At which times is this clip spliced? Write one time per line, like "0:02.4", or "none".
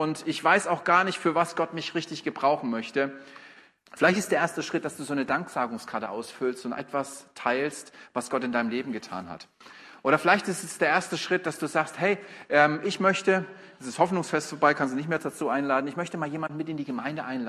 0:03.9